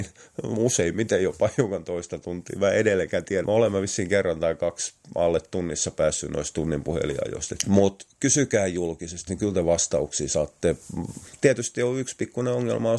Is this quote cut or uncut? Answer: cut